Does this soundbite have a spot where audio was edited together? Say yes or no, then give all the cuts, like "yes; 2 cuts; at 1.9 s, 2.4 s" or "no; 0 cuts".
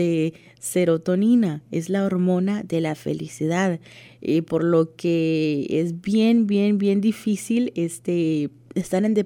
no; 0 cuts